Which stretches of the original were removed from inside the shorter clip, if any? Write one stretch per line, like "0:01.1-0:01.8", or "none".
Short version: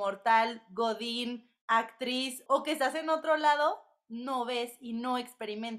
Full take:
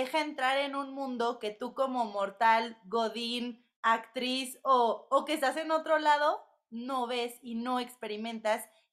0:04.6-0:05.1